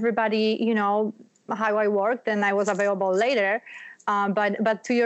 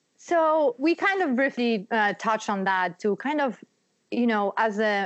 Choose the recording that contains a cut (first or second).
first